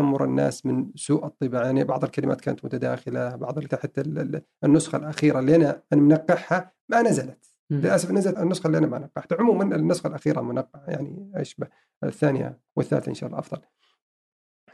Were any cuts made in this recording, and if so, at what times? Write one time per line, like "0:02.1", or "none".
0:03.7
0:08.3
0:12.7